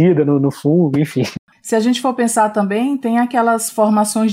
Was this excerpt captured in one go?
no; 1 cut; at 1.5 s

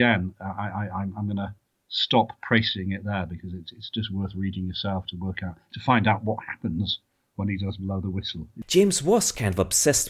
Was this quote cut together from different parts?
no; 0 cuts

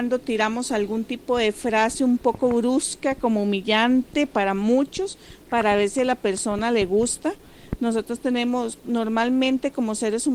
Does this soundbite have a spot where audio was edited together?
no; 0 cuts

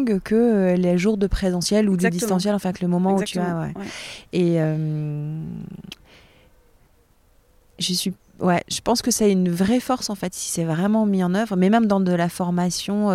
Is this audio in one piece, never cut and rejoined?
yes; 0 cuts

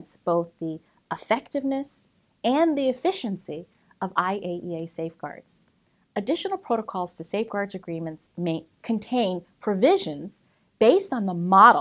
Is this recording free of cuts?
yes; 0 cuts

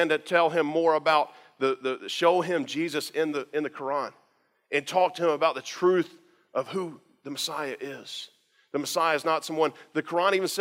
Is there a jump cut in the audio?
no; 0 cuts

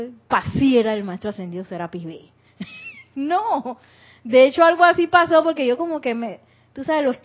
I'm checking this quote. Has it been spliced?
no; 0 cuts

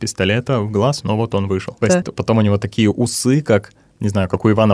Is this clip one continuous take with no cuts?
no; 1 cut; at 1.8 s

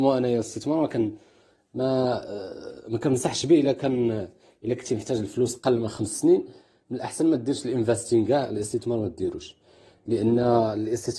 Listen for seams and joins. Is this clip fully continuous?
yes; 0 cuts

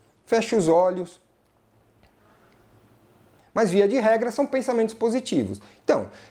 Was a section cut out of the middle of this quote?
yes; 1 cut; at 3.4 s

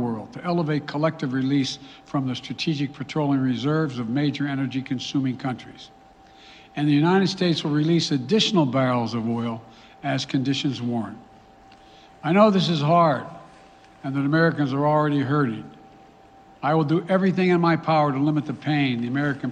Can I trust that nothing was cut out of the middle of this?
yes; 0 cuts

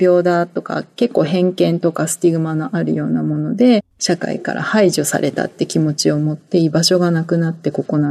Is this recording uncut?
yes; 0 cuts

